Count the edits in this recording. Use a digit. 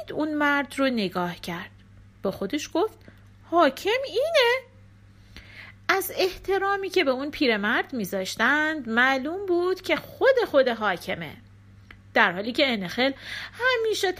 0